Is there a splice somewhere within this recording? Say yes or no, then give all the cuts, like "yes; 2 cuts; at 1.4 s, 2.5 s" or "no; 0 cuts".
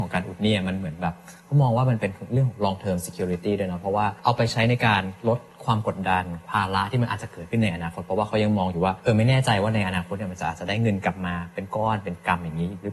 no; 0 cuts